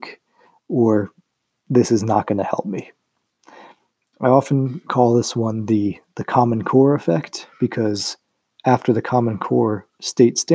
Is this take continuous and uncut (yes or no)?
yes